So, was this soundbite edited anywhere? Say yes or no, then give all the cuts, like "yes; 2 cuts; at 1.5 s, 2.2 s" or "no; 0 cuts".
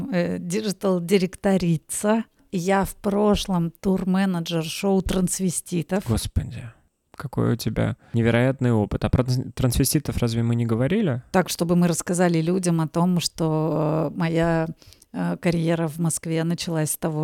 no; 0 cuts